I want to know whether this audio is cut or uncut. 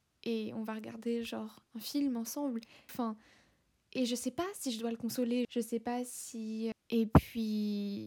cut